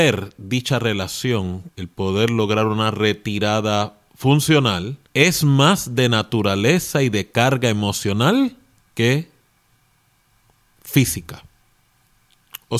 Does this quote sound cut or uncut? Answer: cut